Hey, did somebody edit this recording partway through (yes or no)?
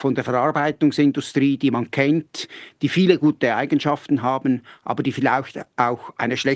no